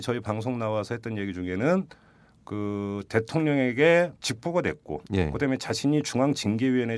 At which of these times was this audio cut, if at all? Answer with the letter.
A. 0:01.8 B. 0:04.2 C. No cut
B